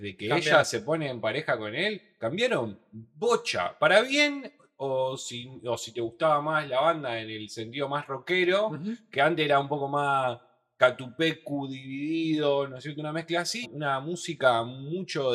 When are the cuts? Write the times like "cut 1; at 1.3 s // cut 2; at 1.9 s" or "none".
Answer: cut 1; at 13.6 s